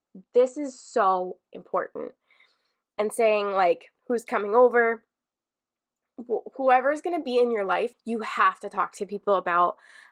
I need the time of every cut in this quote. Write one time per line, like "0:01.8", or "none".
0:04.0
0:07.9